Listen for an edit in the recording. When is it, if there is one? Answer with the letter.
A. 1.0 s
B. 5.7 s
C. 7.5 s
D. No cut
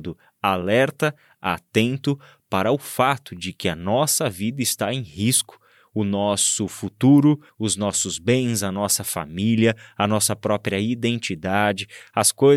C